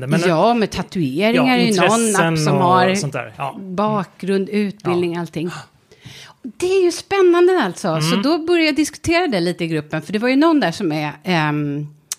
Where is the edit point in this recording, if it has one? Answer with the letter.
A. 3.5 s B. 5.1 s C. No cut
C